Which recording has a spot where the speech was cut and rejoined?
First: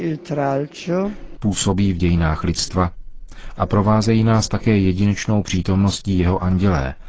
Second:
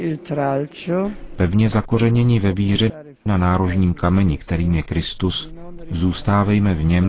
first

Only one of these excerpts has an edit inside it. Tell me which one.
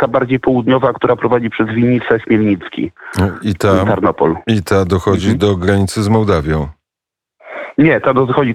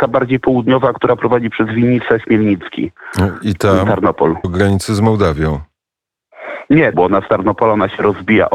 second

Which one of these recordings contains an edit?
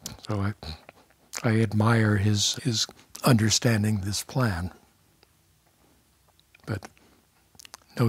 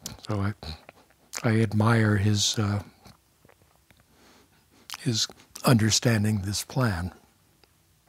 first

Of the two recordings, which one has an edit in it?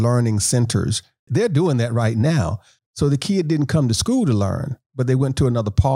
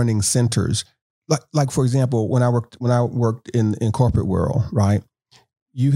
first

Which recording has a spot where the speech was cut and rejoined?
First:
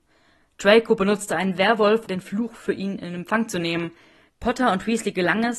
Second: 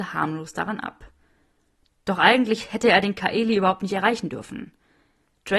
first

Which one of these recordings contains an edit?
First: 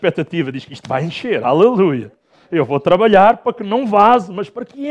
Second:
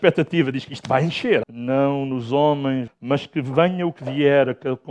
second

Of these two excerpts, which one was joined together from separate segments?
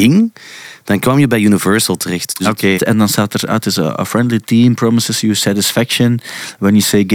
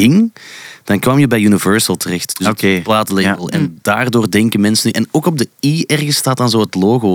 first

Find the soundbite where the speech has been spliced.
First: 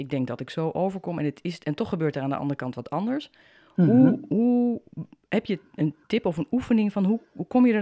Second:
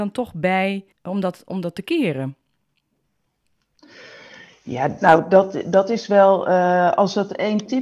second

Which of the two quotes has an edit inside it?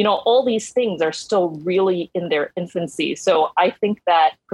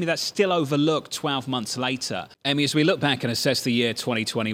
second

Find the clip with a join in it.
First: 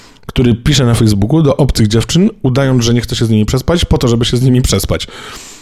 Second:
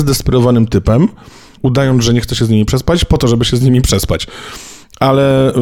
second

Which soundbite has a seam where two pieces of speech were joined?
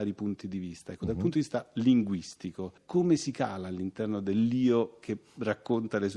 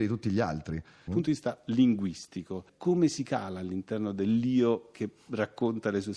second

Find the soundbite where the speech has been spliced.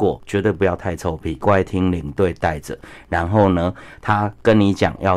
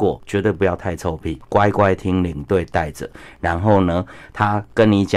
first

